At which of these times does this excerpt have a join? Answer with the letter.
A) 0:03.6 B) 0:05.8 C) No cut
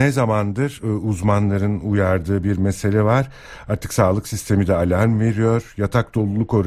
C